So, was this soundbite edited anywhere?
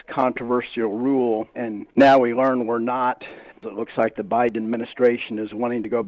yes; 1 cut; at 1.5 s

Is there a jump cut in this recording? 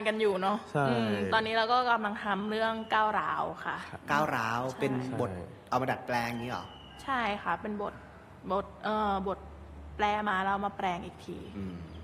no; 0 cuts

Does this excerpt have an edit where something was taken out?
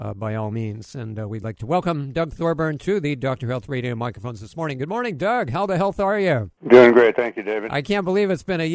yes; 1 cut; at 6.6 s

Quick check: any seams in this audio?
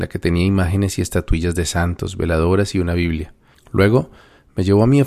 yes; 1 cut; at 3.5 s

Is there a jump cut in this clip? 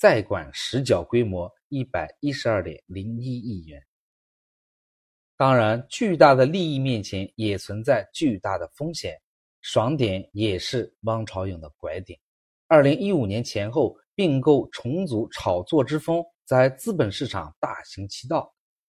no; 0 cuts

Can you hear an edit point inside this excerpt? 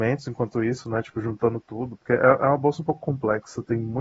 no; 0 cuts

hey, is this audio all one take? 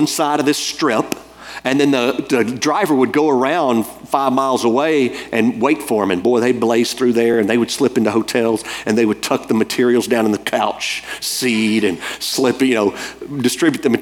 yes; 0 cuts

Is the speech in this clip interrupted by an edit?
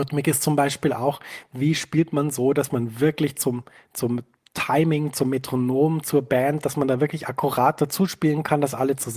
no; 0 cuts

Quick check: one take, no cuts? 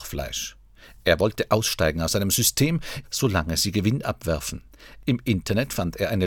no; 2 cuts; at 3.0 s, 5.0 s

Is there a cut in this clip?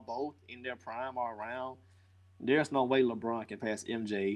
no; 0 cuts

